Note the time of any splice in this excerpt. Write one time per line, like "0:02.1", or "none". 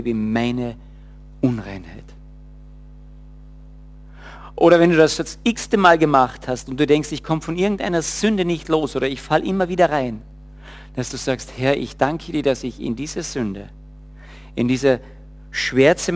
none